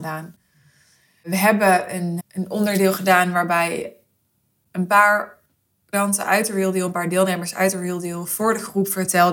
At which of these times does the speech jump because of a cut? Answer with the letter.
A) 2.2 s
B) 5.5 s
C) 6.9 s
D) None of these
A